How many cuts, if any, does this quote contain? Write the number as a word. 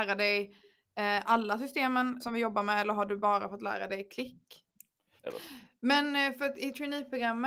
two